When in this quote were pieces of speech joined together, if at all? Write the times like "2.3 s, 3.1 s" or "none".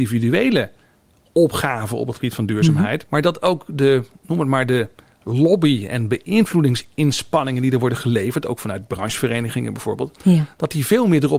3.1 s